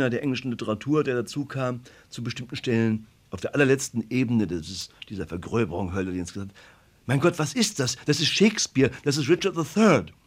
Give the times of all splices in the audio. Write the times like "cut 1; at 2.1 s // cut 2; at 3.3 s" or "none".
none